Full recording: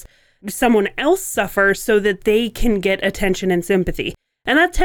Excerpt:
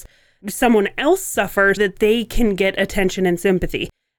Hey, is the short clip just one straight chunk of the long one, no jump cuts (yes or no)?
no